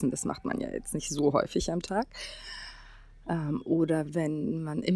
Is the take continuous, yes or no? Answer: yes